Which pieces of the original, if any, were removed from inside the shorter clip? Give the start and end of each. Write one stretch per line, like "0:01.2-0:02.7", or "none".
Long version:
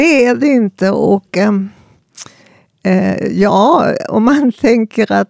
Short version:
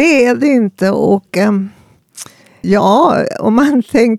0:02.6-0:03.3